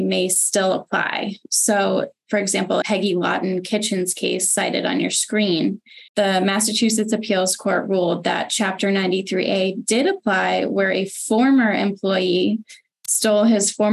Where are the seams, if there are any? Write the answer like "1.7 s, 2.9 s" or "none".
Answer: 2.8 s, 6.1 s

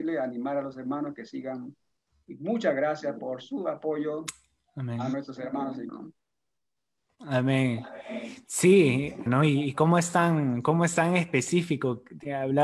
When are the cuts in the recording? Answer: 5.9 s, 9.3 s

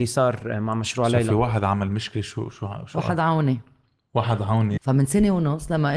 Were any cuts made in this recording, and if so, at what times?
4.8 s

